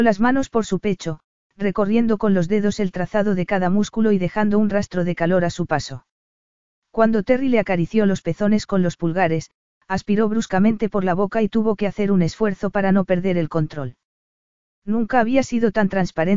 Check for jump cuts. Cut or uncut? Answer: cut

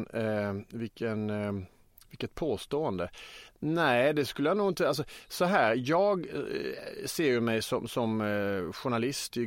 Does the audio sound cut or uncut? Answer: uncut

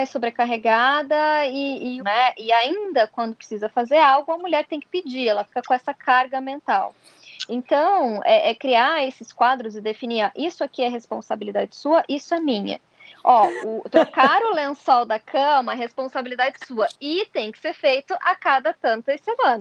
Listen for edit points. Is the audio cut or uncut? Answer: cut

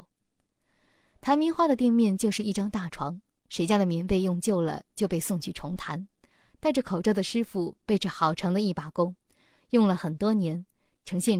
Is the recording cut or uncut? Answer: uncut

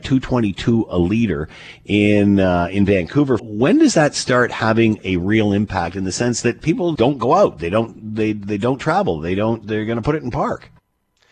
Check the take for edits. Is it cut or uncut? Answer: cut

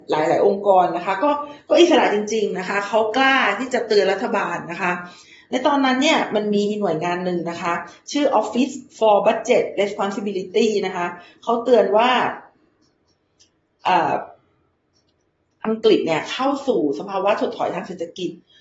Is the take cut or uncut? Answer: uncut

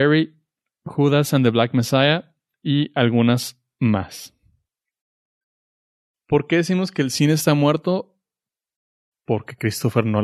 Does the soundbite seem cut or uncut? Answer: uncut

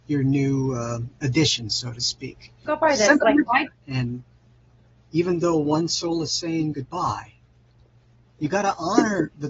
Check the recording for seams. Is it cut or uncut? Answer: cut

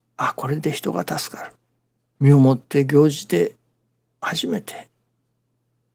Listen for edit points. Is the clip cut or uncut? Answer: cut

